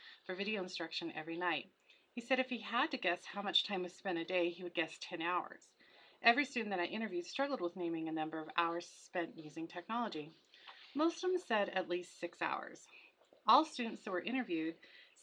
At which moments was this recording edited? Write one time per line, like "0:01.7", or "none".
none